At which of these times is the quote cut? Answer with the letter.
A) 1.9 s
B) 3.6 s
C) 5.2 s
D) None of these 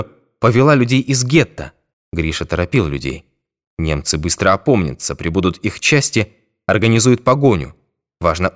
A